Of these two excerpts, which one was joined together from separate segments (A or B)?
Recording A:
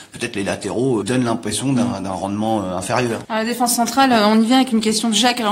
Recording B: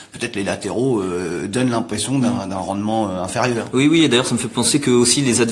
A